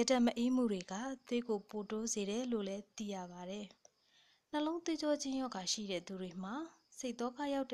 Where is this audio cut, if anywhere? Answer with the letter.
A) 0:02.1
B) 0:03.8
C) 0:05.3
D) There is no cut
B